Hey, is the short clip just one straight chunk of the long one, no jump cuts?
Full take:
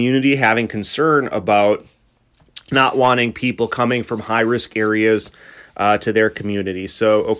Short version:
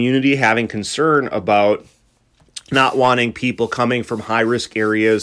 yes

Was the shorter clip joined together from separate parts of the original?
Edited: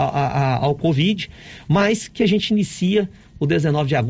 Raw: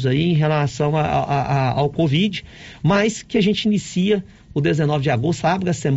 no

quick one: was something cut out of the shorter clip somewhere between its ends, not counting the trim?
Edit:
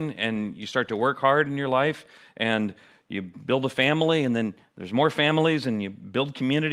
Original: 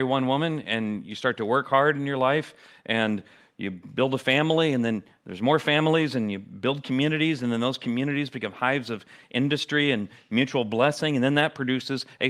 no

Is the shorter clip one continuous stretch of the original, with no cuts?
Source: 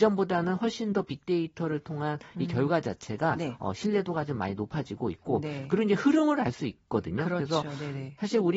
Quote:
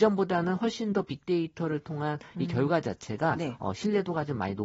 yes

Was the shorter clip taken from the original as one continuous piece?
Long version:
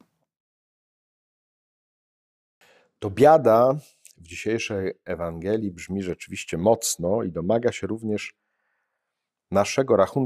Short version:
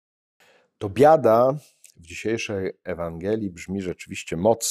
yes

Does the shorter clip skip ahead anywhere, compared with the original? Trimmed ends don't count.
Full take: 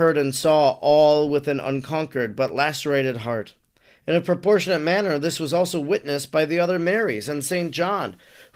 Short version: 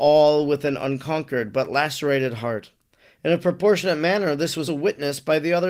yes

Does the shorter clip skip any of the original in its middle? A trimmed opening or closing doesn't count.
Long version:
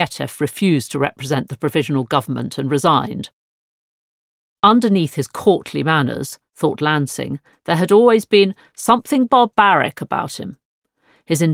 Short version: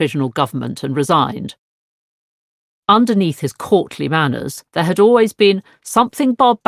yes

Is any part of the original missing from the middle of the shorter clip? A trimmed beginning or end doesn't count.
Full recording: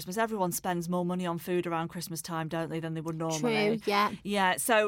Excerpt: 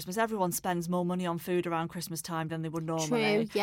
yes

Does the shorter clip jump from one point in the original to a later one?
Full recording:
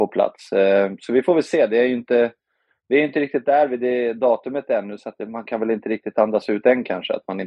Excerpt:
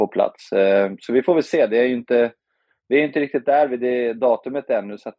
no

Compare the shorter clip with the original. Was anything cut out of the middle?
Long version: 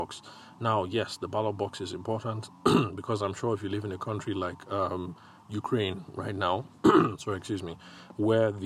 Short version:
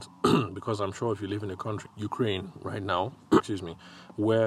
yes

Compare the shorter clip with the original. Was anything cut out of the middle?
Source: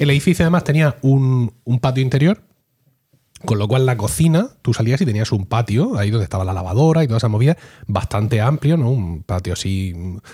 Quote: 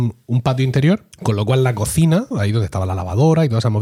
yes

